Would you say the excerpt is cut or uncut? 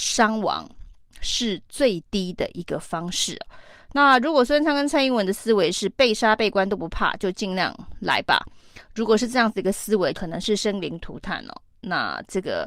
cut